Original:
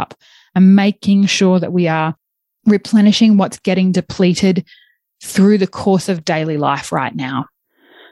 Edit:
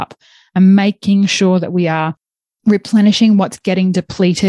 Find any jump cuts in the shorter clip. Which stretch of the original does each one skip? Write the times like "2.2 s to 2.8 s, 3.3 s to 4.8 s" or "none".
none